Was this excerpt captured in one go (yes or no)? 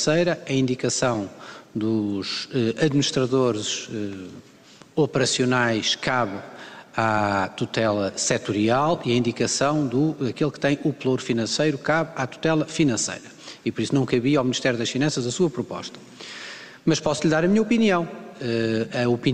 yes